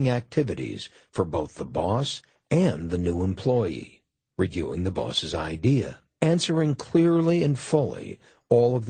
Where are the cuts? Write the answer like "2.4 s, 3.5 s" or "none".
4.3 s, 6.2 s